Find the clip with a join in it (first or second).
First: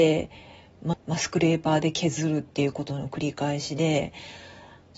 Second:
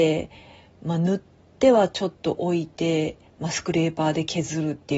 first